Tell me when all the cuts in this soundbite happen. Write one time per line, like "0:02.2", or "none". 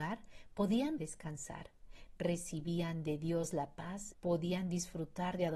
0:01.0
0:04.1